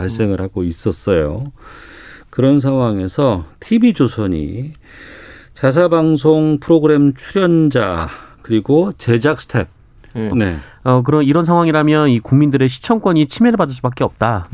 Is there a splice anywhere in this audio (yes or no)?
yes